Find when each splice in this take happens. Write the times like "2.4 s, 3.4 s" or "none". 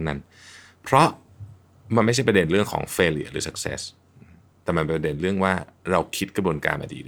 none